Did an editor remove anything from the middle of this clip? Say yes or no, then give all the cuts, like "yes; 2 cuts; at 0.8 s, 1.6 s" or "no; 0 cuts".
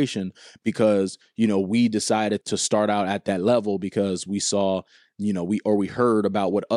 yes; 1 cut; at 2.4 s